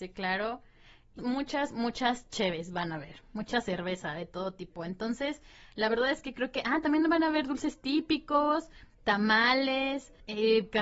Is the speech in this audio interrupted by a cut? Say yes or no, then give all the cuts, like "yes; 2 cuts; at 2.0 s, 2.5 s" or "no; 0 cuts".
yes; 1 cut; at 1.2 s